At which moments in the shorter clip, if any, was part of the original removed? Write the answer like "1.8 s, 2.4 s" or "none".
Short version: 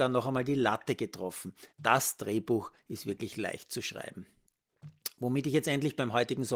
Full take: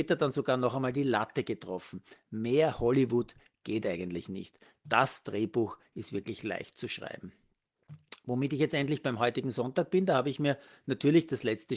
1.7 s